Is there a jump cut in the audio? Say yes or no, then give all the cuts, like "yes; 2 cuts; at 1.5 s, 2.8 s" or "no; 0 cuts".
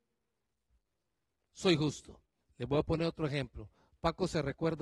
yes; 1 cut; at 2.4 s